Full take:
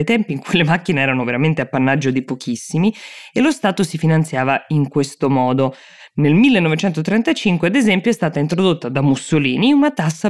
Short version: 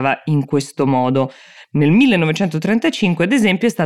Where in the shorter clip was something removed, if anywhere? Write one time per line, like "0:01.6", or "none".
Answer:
none